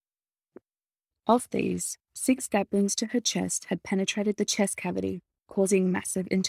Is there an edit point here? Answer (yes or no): yes